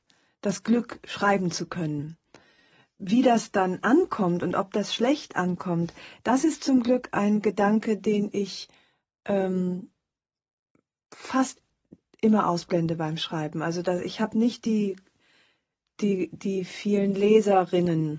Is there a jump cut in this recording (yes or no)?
no